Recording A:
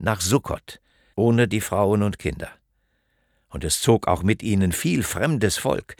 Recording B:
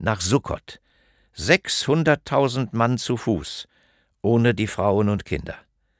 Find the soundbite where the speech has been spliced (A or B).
A